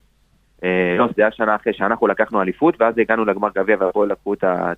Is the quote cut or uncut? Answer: cut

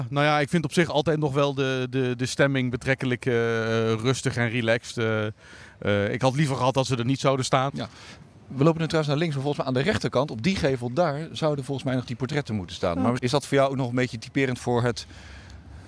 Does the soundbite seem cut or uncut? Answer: cut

